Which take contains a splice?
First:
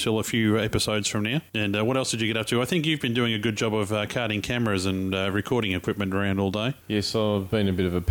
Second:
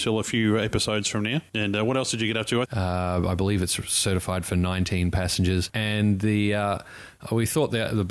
second; 2 cuts; at 2.6 s, 5.7 s

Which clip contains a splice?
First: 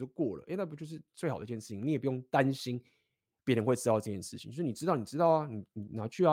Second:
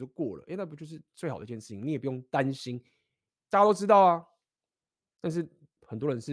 second; 1 cut; at 3.3 s

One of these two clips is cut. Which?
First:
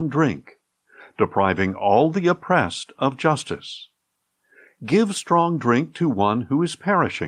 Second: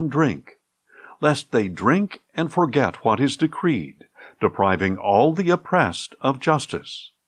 first; 1 cut; at 1.0 s

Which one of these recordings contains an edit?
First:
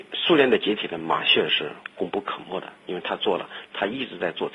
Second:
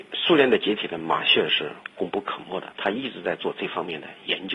second; 1 cut; at 2.7 s

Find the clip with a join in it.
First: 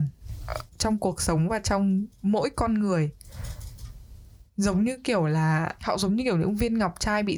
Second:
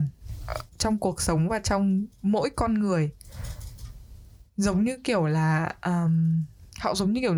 first; 1 cut; at 5.8 s

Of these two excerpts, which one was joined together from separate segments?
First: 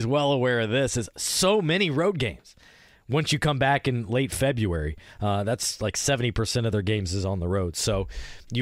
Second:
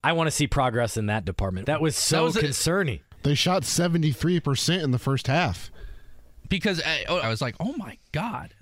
second; 2 cuts; at 1.6 s, 7.2 s

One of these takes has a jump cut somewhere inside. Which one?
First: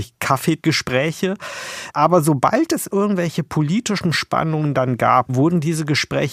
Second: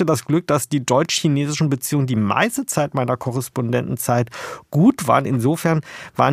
first; 2 cuts; at 1.9 s, 5.3 s

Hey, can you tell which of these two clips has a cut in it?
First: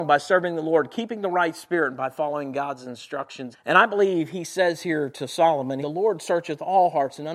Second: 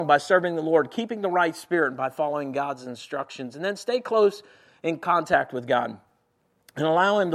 first; 2 cuts; at 3.5 s, 5.8 s

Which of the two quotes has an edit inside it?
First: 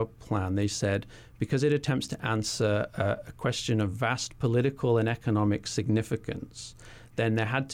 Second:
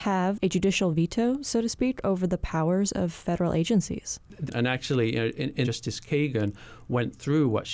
second; 2 cuts; at 4.5 s, 5.6 s

